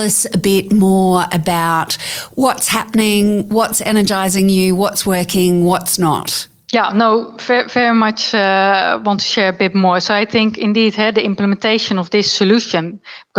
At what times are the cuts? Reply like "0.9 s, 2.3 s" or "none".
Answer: none